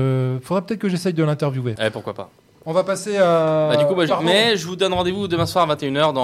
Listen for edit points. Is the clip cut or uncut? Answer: cut